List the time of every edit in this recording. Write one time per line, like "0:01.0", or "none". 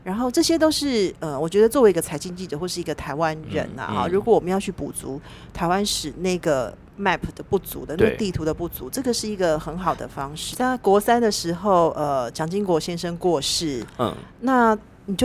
0:10.5